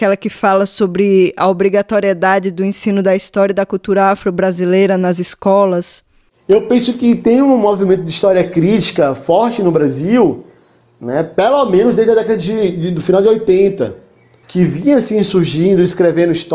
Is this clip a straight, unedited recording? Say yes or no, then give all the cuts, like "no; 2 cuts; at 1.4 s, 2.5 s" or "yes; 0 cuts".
yes; 0 cuts